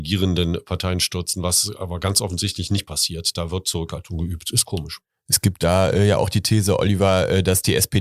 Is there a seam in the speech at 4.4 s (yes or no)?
no